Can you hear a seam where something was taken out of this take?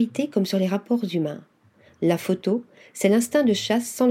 no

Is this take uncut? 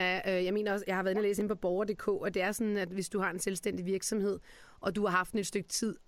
yes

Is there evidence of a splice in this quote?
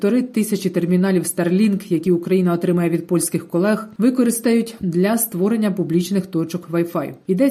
no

